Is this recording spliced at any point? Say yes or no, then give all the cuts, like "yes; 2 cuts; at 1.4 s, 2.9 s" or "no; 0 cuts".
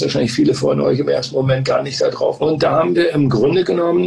yes; 1 cut; at 2.4 s